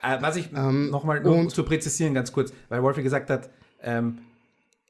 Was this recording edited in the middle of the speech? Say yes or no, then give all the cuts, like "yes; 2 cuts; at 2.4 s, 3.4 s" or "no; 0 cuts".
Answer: no; 0 cuts